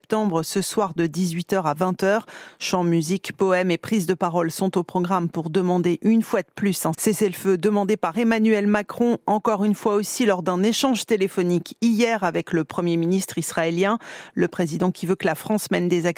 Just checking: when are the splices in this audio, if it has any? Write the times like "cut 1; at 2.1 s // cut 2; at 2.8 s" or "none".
cut 1; at 6.9 s